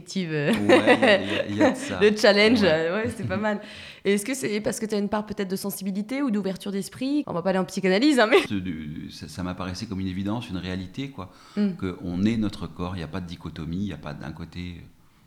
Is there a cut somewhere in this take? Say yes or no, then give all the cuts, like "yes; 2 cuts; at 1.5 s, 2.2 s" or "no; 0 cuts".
yes; 1 cut; at 8.5 s